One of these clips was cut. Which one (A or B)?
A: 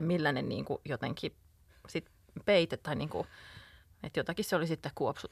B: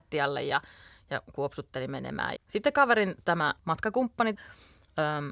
B